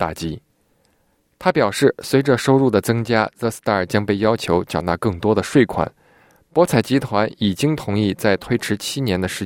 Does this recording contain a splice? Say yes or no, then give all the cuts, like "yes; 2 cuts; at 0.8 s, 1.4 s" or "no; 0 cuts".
no; 0 cuts